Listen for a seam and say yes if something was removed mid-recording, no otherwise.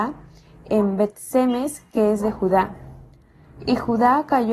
no